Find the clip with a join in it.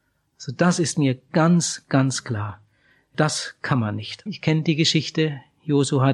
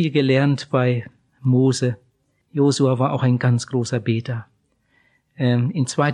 first; 1 cut; at 4.3 s

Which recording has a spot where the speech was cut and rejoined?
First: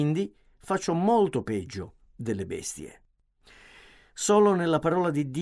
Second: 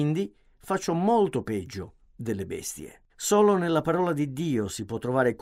second; 1 cut; at 3.1 s

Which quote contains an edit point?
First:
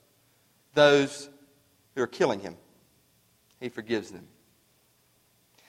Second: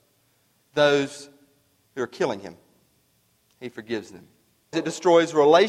second; 1 cut; at 4.7 s

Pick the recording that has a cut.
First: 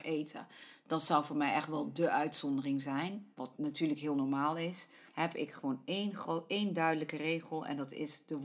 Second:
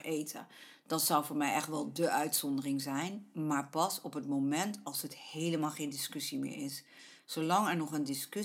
first; 2 cuts; at 3.3 s, 5.1 s

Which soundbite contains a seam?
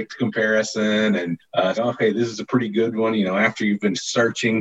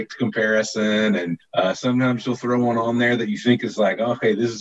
first; 1 cut; at 1.7 s

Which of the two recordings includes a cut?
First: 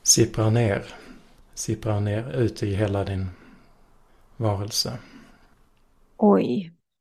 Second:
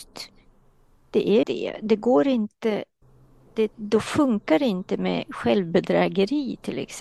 second; 1 cut; at 1.4 s

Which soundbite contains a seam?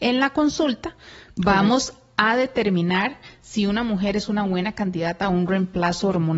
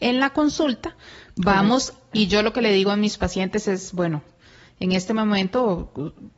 second; 1 cut; at 2.1 s

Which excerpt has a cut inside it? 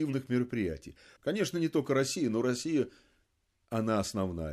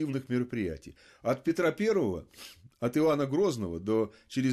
first; 1 cut; at 1.2 s

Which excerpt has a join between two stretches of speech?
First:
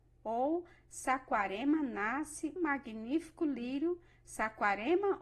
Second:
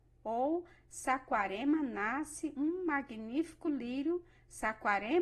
first; 1 cut; at 2.6 s

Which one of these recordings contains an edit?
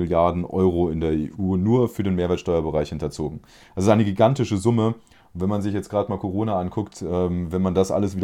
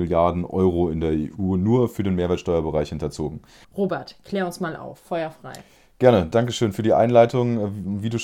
second; 1 cut; at 3.6 s

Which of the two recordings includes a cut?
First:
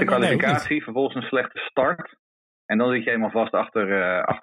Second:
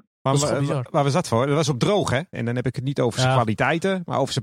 second; 1 cut; at 2.3 s

